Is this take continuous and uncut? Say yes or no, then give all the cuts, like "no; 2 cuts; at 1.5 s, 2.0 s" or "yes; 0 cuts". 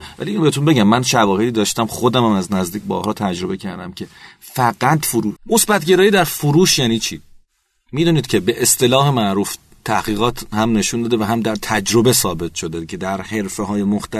no; 1 cut; at 5.4 s